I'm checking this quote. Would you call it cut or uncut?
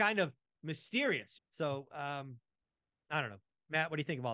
cut